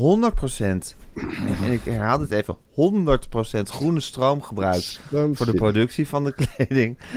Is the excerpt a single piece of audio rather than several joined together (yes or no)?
yes